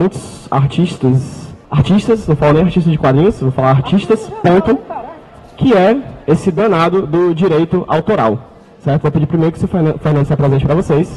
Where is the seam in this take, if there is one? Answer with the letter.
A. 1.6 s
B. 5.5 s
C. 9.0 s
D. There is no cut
A